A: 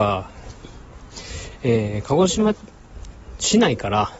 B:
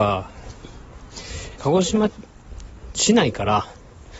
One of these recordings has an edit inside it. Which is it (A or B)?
B